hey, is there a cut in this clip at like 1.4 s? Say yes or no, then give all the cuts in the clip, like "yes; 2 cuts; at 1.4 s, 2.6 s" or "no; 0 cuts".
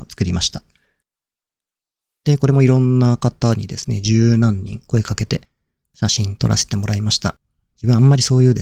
no; 0 cuts